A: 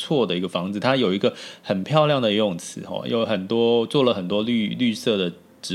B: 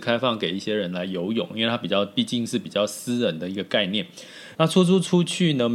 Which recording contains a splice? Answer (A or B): B